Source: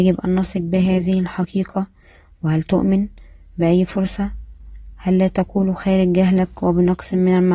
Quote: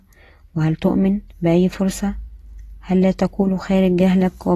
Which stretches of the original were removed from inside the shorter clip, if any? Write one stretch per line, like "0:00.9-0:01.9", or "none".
0:03.2-0:03.5